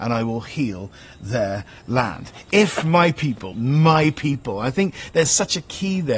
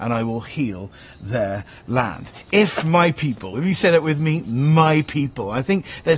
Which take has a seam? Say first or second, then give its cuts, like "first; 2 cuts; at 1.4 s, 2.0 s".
first; 1 cut; at 3.5 s